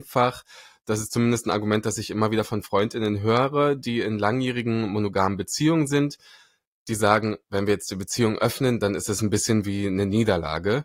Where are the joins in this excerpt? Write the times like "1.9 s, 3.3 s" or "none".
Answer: none